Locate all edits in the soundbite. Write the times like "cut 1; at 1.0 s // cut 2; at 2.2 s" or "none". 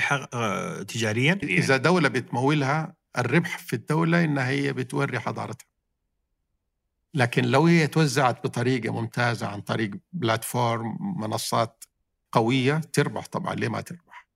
cut 1; at 1.4 s